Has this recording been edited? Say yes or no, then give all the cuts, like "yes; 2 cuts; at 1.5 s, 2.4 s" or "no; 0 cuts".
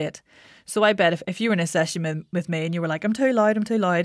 no; 0 cuts